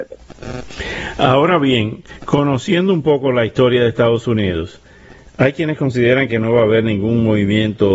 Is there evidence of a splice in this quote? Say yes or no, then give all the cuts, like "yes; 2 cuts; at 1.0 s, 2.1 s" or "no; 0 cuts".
no; 0 cuts